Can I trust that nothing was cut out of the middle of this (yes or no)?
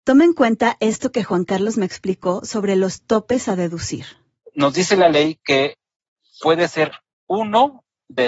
yes